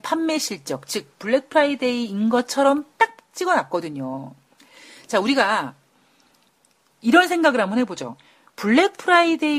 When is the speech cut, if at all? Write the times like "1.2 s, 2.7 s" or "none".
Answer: 6.9 s